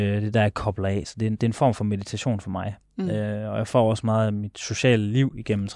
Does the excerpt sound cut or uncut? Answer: uncut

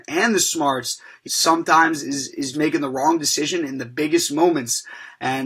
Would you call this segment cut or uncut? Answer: cut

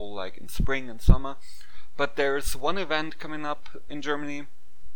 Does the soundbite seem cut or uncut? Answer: cut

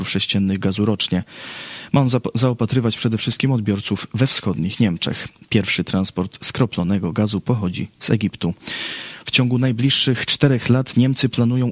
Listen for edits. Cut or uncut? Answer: uncut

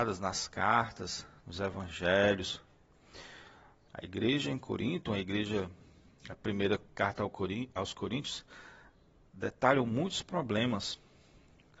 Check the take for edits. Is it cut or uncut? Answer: cut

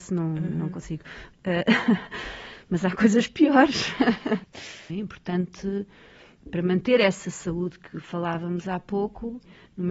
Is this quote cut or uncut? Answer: cut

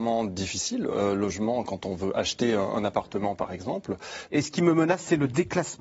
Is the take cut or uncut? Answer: cut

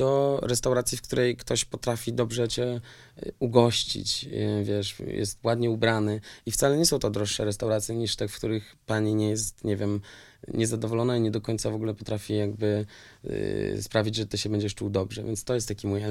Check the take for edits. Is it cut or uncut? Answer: uncut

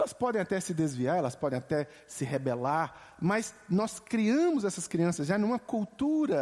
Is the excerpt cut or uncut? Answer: uncut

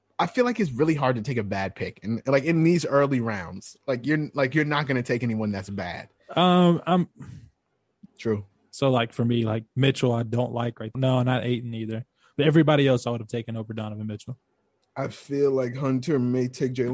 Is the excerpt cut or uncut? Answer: cut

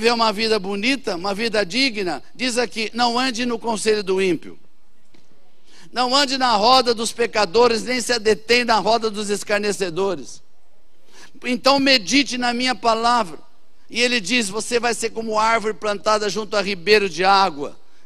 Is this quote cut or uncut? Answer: uncut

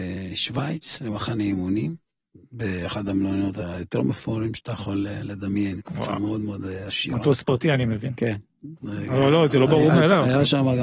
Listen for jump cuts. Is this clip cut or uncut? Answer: uncut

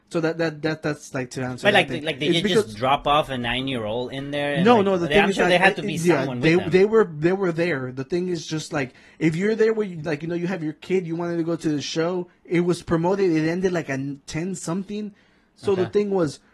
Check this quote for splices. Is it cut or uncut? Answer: uncut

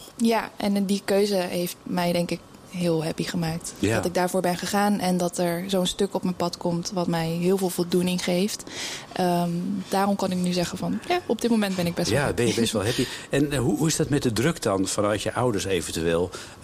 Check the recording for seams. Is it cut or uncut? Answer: uncut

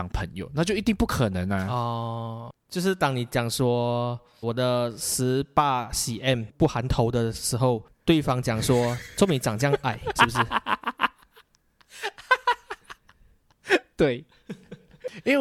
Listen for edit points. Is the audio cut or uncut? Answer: cut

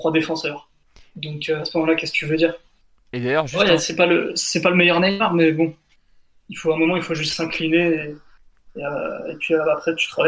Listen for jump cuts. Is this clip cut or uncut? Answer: uncut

